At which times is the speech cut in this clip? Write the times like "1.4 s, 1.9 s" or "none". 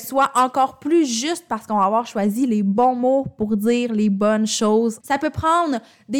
5.0 s